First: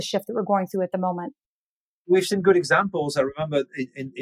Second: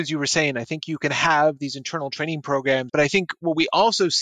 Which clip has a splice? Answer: second; 1 cut; at 2.9 s

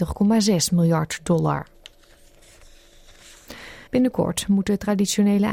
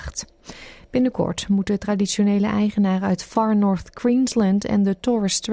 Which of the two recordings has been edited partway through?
first; 1 cut; at 3.9 s

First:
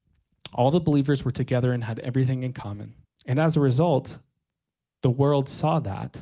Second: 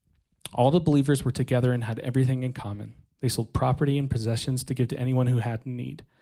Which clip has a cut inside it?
first; 1 cut; at 3.0 s

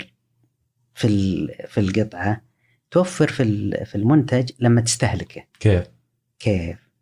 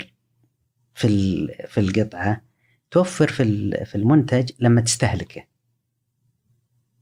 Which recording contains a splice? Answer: first; 1 cut; at 5.5 s

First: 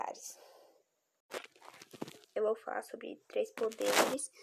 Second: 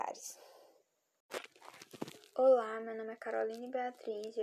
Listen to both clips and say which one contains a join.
first; 1 cut; at 2.2 s

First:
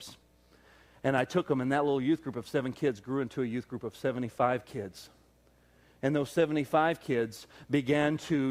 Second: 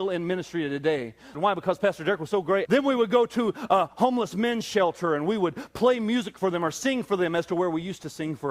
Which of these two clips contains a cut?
second; 2 cuts; at 1.3 s, 2.7 s

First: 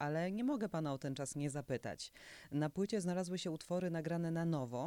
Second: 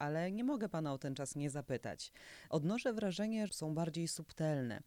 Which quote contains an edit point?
second; 2 cuts; at 2.5 s, 3.5 s

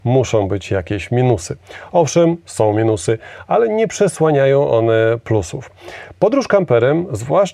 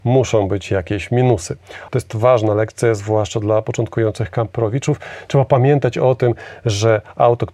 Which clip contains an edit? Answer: second; 1 cut; at 1.9 s

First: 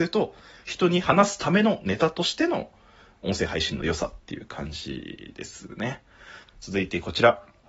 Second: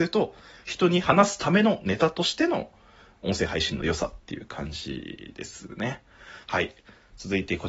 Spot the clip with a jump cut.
first; 1 cut; at 6.5 s

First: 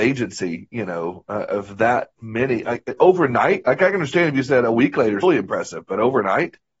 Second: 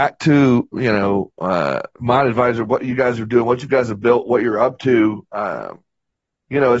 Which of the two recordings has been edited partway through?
first; 1 cut; at 5.2 s

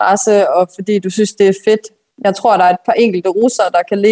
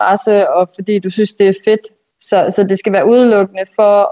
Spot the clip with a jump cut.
second; 1 cut; at 2.1 s

